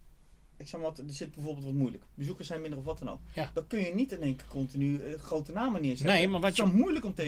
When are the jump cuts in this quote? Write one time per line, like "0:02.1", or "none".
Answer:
none

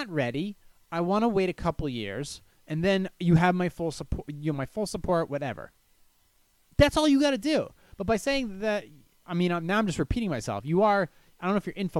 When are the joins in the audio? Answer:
none

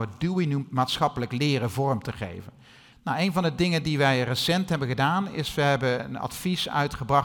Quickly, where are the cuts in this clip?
0:02.9
0:06.0

